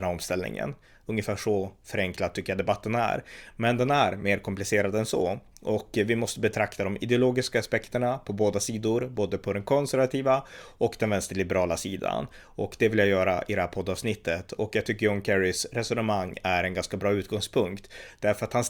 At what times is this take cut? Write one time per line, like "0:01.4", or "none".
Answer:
none